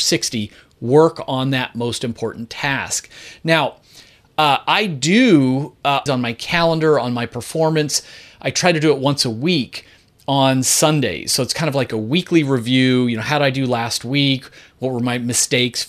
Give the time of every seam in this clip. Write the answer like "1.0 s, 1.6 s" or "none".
6.1 s

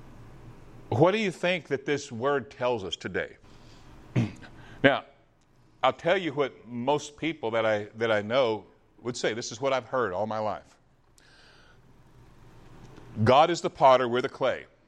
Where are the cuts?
3.4 s

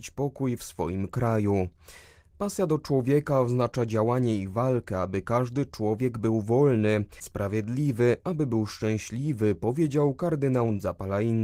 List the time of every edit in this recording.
7.2 s

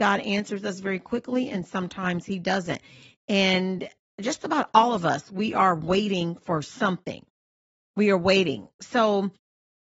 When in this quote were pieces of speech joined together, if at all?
none

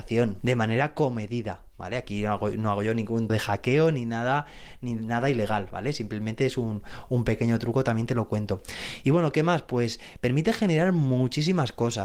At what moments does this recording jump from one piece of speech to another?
3.3 s

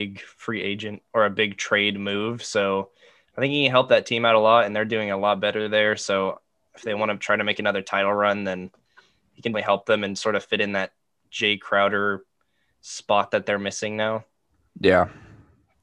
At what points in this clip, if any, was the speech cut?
9.5 s

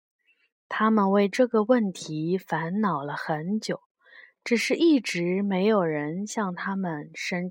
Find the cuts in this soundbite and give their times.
none

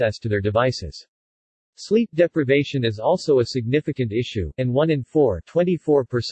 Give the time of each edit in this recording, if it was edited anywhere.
4.5 s

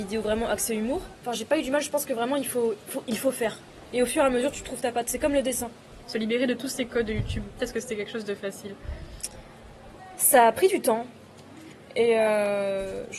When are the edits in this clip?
3.9 s, 6.0 s, 7.6 s

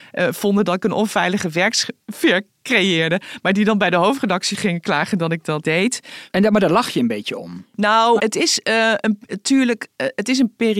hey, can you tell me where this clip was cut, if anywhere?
5.6 s, 8.2 s

